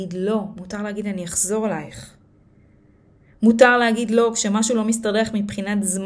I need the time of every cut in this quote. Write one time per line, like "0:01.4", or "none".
none